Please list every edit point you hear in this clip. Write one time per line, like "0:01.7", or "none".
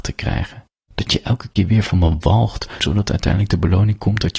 0:02.8